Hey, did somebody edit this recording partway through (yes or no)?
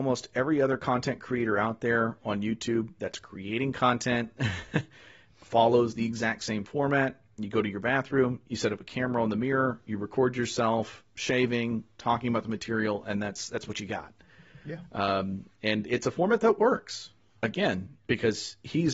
no